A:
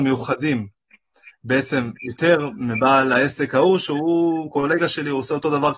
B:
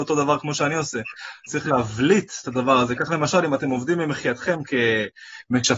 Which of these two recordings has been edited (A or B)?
B